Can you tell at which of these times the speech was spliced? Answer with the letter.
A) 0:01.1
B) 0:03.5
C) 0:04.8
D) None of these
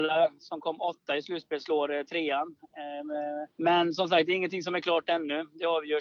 B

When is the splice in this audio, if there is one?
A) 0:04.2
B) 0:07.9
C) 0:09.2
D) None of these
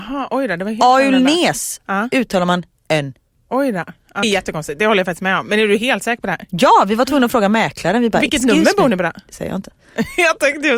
A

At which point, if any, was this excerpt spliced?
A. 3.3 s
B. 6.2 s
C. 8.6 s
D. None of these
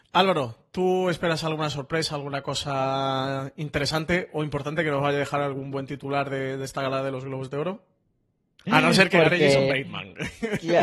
C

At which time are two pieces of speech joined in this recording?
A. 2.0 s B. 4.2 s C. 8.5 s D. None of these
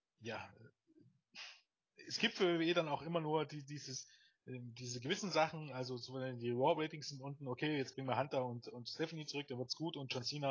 D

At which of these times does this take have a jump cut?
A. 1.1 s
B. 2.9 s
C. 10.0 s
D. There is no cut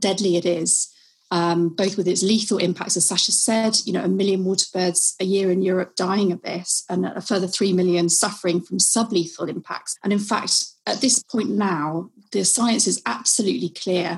C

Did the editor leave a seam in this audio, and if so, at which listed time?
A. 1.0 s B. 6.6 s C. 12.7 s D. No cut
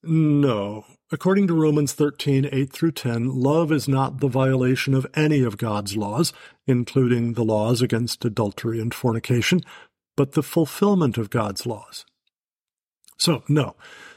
D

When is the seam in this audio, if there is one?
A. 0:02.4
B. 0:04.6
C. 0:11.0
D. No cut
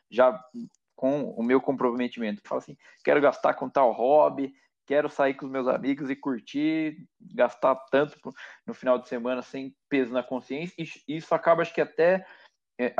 A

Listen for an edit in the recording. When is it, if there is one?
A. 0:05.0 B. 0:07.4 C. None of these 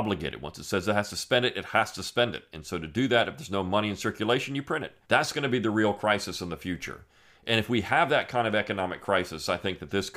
A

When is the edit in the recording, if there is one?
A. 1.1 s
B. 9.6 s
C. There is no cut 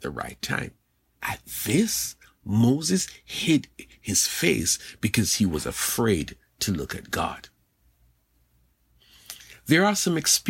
A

